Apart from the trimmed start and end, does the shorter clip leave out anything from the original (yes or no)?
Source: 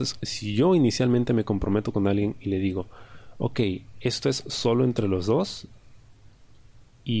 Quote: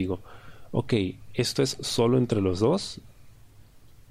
no